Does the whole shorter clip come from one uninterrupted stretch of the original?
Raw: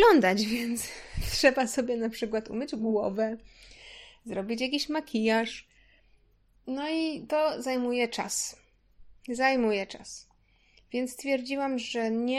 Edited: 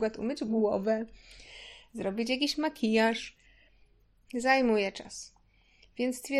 no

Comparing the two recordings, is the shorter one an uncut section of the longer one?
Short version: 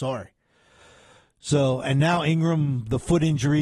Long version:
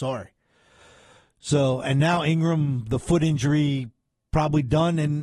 yes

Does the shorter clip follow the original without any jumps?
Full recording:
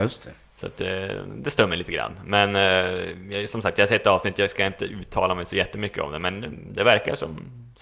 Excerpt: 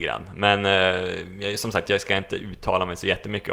no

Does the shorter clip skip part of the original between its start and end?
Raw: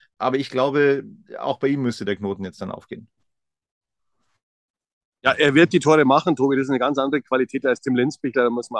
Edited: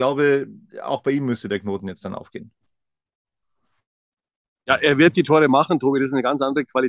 no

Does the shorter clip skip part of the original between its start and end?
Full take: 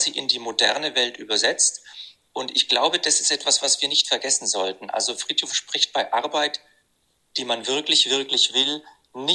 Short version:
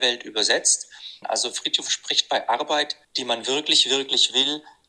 yes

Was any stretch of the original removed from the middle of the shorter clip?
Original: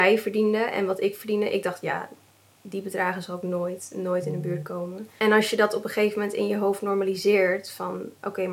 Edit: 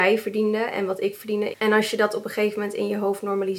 yes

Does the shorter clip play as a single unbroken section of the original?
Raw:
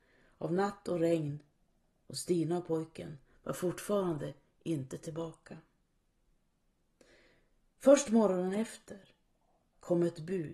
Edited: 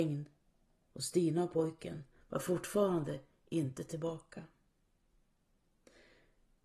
yes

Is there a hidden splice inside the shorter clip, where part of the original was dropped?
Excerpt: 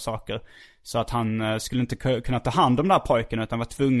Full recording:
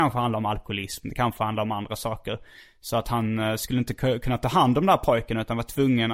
no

